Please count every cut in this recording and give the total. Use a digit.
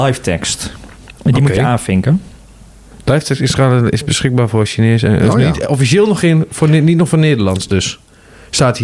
0